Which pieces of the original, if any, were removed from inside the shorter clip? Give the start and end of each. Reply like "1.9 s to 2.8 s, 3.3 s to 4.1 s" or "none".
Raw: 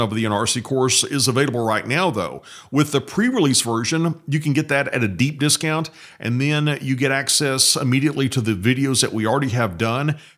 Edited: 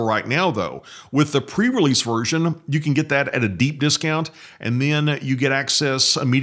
none